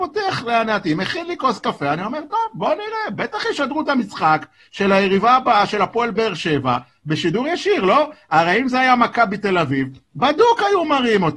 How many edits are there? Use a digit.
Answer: 0